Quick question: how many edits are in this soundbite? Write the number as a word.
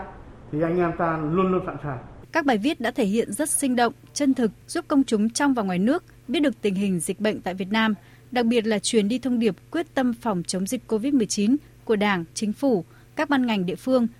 three